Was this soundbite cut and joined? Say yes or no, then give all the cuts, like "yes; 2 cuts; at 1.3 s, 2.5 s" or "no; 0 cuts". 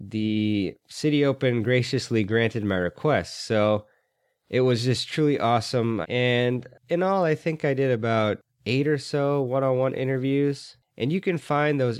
yes; 1 cut; at 6.0 s